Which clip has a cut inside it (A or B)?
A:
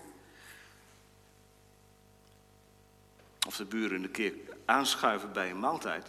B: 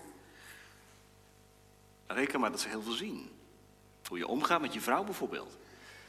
B